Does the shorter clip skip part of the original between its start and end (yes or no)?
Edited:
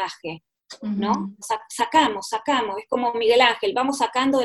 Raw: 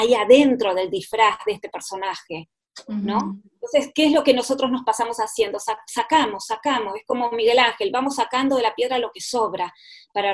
yes